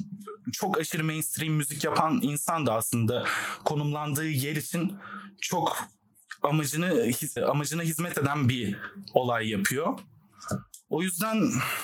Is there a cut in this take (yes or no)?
yes